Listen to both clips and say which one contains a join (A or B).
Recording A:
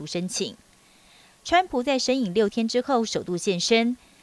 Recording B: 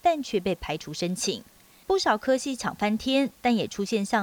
B